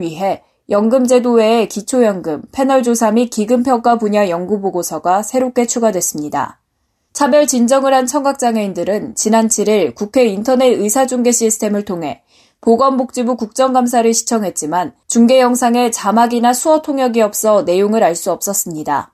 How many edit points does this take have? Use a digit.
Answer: 2